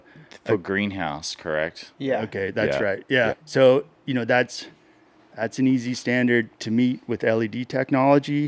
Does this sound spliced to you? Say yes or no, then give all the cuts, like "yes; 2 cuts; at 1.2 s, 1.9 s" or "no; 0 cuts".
yes; 3 cuts; at 1.9 s, 3.3 s, 6.5 s